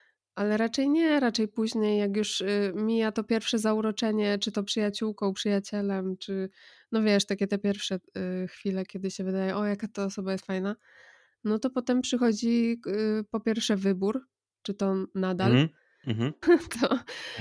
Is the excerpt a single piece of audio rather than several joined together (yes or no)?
no